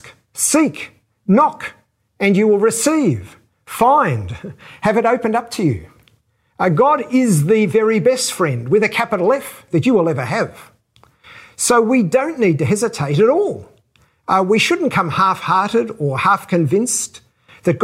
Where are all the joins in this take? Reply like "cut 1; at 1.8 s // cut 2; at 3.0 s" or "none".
none